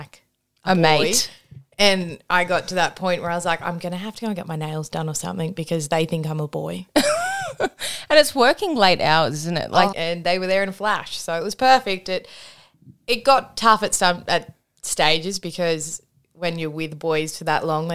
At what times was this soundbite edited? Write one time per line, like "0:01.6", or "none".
0:09.9